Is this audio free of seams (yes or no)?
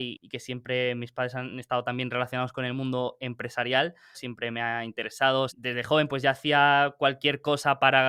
no